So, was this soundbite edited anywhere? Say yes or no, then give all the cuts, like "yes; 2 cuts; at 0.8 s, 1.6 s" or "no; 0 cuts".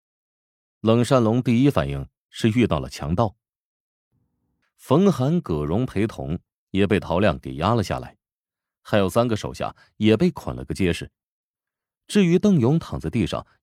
yes; 1 cut; at 4.6 s